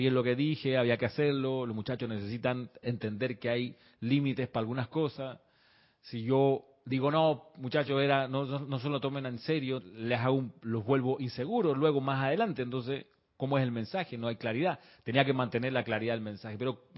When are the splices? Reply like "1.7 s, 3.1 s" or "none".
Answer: 9.8 s